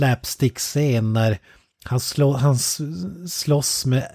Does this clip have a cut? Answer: no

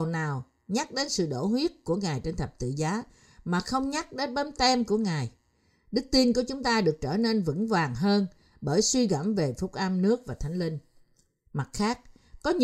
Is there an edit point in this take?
no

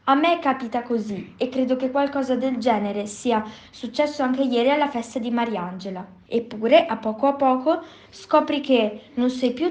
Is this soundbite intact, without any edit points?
no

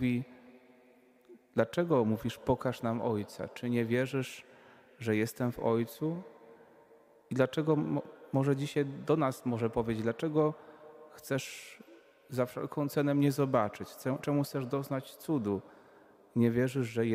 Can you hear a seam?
no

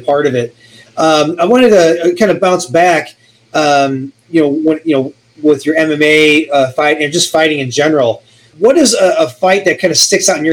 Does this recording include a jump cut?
yes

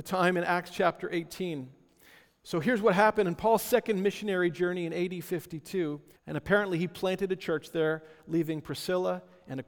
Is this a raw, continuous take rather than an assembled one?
no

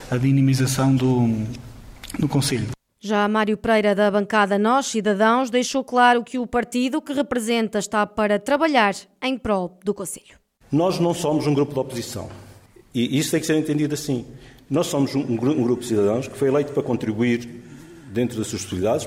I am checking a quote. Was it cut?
no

